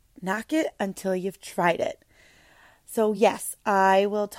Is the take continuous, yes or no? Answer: yes